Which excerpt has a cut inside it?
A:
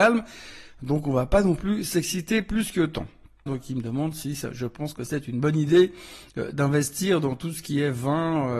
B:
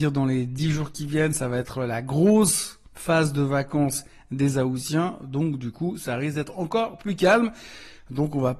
A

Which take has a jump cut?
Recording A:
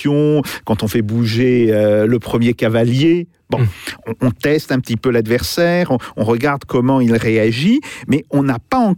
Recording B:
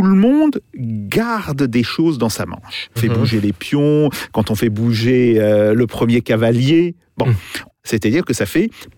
B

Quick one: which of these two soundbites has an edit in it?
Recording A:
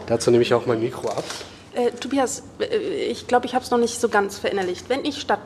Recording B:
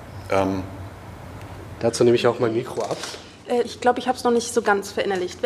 B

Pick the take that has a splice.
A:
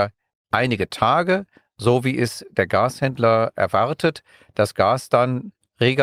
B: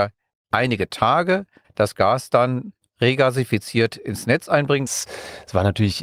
B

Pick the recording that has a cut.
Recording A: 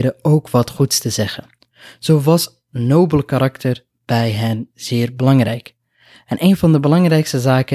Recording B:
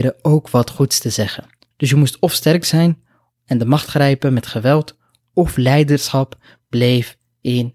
B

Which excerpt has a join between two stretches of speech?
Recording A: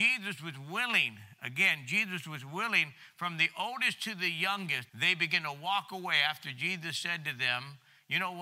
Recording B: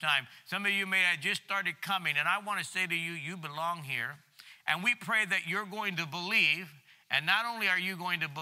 A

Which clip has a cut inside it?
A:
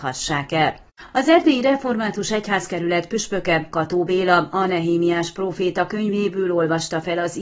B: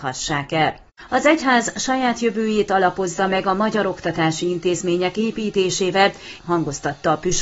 B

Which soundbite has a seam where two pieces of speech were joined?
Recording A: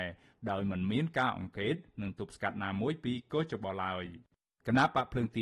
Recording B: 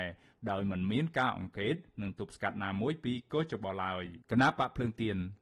B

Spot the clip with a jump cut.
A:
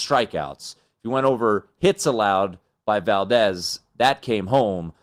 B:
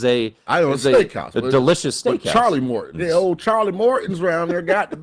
B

